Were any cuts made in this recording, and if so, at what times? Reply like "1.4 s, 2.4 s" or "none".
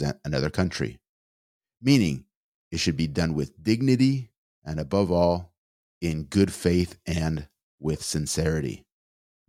4.5 s